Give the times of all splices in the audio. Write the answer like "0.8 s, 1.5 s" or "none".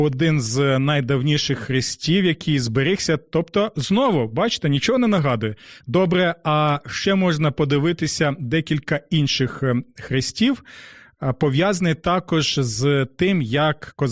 5.8 s